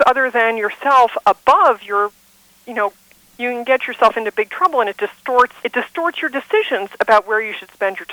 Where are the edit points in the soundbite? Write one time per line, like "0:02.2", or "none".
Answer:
0:03.3
0:05.6